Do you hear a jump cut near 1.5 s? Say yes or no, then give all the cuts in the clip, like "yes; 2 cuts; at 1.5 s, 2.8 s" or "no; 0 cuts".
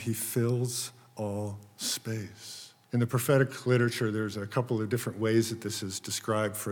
no; 1 cut; at 2.8 s